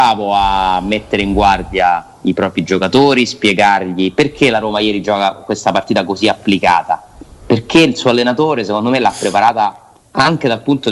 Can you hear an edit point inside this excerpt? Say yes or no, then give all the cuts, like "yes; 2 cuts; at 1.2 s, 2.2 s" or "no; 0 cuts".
yes; 1 cut; at 10.0 s